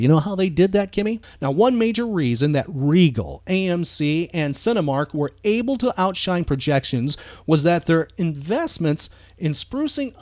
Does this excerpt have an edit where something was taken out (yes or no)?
yes